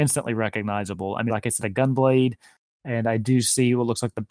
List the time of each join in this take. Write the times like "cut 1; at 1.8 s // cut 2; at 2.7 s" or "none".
cut 1; at 1.3 s